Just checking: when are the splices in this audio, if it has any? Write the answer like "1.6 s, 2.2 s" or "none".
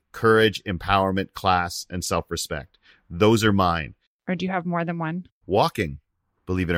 4.0 s